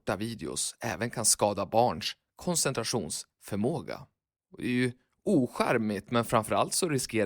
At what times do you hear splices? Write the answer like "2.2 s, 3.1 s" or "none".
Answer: 4.4 s, 6.1 s